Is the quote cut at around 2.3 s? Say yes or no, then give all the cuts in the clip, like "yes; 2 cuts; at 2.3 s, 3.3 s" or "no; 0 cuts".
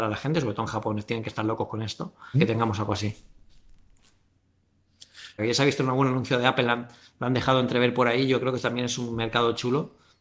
yes; 2 cuts; at 2.3 s, 5.4 s